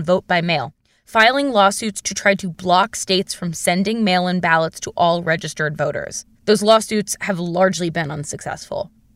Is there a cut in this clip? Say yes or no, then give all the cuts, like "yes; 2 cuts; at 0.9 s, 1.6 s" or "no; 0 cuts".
yes; 1 cut; at 6.3 s